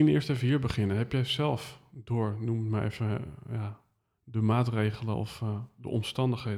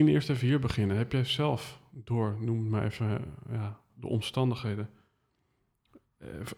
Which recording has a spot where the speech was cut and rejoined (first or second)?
second